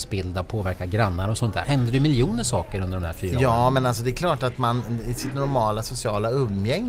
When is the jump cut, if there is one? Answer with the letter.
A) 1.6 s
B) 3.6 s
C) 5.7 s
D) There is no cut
A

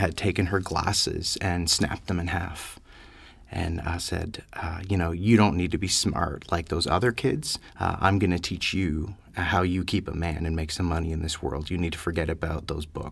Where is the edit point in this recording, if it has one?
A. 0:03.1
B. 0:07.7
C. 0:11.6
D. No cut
B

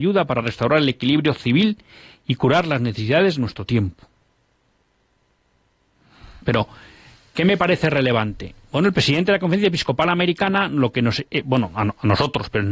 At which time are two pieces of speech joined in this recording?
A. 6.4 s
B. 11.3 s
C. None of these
A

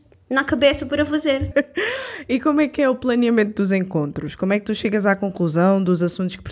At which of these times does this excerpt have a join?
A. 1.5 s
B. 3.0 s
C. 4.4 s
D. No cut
A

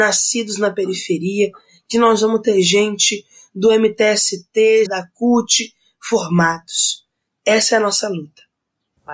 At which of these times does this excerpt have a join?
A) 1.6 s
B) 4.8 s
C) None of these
B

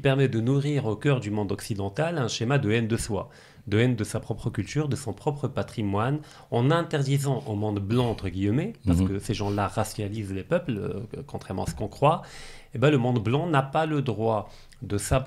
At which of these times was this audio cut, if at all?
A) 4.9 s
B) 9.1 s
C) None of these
C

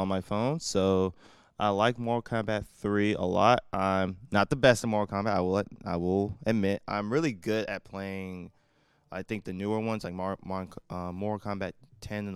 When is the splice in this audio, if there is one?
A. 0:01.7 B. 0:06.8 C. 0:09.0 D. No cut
D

